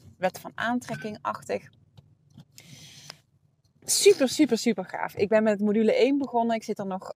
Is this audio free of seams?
yes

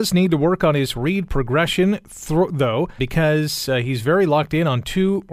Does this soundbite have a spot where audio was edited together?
yes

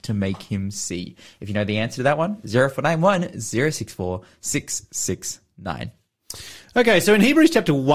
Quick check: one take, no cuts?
yes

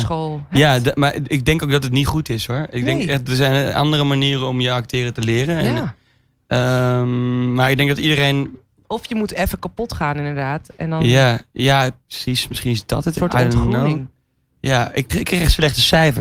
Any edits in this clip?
yes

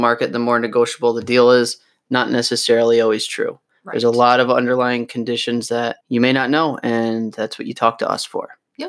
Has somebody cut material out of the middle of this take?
yes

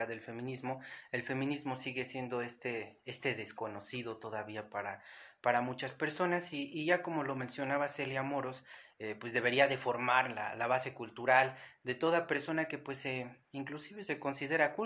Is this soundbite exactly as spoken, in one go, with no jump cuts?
yes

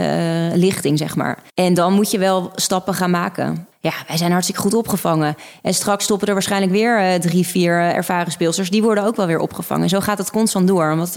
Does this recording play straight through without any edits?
no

